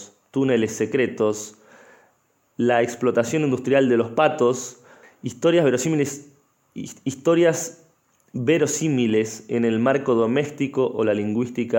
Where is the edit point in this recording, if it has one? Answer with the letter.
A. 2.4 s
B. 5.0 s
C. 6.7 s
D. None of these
B